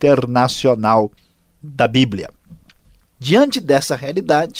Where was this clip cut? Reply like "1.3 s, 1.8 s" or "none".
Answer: none